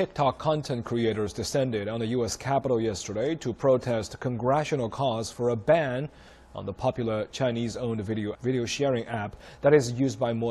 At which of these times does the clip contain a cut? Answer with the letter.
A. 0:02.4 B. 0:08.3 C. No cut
B